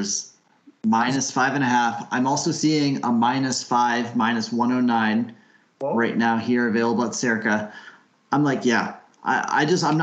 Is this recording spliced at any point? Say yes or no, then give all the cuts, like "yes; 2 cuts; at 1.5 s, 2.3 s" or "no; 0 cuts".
no; 0 cuts